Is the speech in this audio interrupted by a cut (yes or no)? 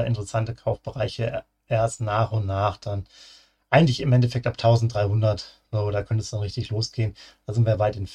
no